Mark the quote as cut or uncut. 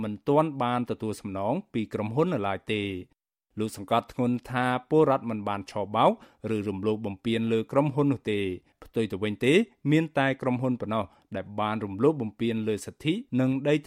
uncut